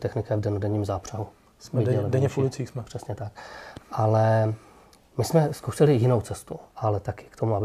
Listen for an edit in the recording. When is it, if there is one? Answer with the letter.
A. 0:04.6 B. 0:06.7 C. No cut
B